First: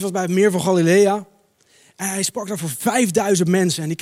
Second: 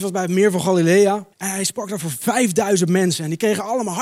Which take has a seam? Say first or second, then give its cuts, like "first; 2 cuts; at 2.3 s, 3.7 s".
second; 1 cut; at 1.3 s